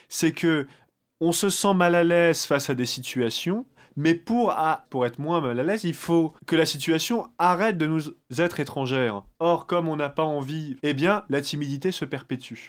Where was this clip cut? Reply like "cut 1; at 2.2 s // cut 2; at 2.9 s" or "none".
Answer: cut 1; at 4.8 s // cut 2; at 6.4 s // cut 3; at 10.8 s